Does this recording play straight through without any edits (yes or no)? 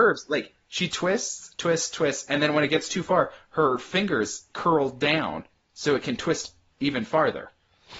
yes